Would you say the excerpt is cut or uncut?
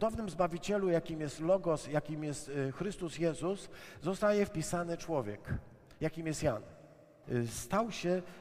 cut